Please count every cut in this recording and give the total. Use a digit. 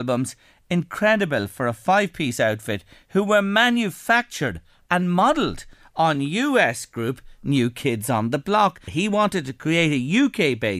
1